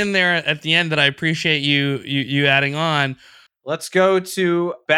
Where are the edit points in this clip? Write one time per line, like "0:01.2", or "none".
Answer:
0:03.5